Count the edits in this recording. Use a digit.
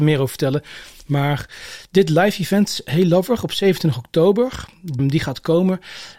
1